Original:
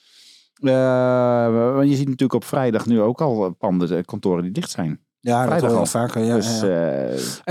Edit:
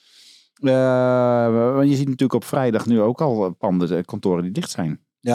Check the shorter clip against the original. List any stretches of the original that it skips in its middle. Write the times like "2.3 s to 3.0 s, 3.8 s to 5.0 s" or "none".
none